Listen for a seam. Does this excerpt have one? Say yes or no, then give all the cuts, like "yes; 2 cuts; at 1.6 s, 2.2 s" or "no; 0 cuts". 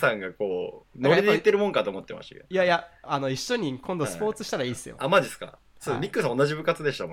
no; 0 cuts